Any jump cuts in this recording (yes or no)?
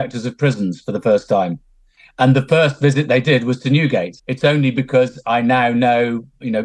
yes